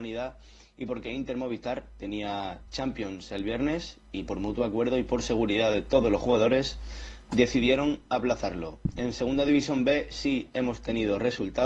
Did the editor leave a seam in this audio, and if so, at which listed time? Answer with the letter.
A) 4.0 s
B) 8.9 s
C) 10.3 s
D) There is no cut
D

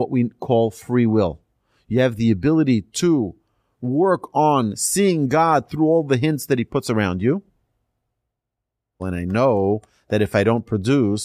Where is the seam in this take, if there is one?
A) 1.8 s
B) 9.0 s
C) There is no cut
B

